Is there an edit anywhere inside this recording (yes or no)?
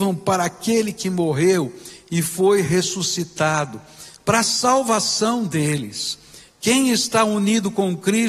no